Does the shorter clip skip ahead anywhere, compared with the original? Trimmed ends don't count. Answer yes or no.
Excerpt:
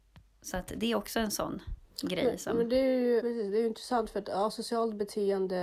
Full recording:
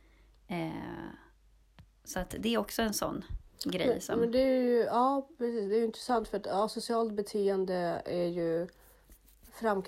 yes